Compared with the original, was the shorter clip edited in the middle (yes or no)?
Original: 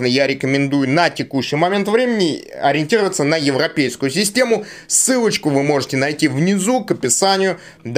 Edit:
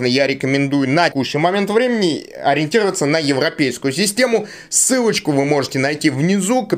yes